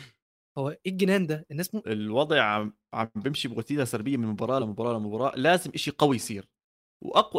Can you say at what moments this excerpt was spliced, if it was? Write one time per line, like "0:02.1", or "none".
0:01.8
0:04.6